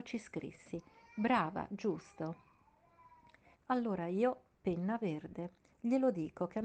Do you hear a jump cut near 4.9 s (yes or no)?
no